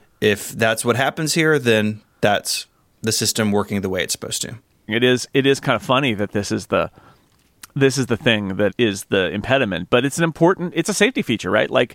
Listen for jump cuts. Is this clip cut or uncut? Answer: cut